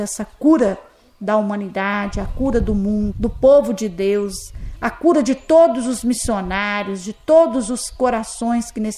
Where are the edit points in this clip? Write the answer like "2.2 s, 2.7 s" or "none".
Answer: 3.1 s